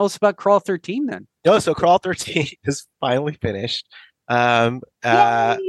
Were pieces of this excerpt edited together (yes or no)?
no